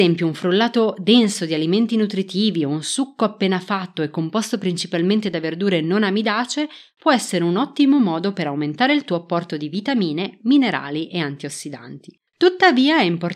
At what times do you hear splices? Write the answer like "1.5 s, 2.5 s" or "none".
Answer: 12.3 s